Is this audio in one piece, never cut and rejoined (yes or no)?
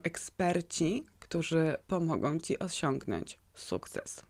yes